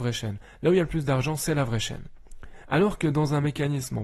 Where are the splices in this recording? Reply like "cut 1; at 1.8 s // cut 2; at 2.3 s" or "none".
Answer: none